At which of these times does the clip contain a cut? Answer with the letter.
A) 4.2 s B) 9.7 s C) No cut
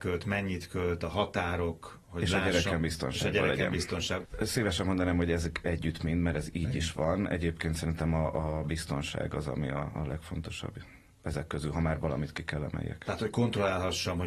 A